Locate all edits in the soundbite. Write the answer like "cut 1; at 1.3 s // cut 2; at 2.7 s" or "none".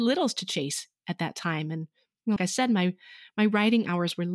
cut 1; at 2.4 s